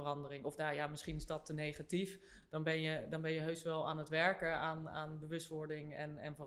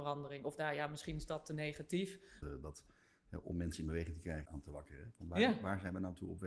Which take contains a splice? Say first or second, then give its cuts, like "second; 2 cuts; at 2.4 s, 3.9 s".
second; 2 cuts; at 2.4 s, 4.5 s